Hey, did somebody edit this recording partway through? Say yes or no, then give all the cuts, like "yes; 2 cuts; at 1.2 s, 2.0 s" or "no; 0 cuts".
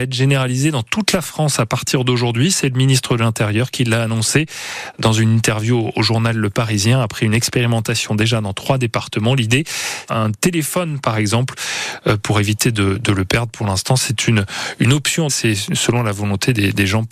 yes; 2 cuts; at 10.1 s, 15.3 s